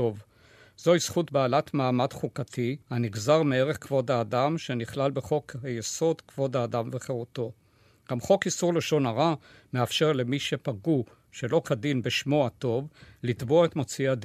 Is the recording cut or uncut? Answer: cut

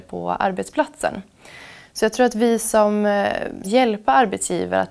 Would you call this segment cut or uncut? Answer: cut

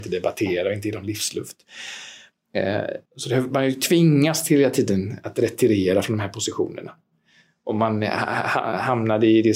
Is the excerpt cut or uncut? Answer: cut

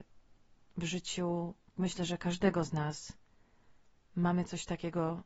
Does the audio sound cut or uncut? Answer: uncut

